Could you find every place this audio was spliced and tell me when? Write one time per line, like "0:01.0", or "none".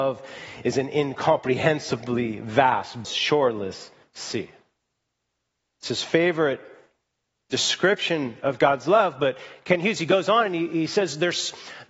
0:03.0